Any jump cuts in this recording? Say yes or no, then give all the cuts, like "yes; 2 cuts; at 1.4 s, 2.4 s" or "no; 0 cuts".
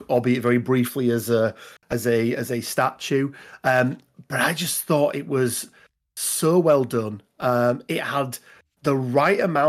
no; 0 cuts